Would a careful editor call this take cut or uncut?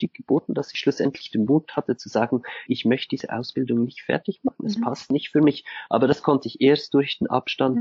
cut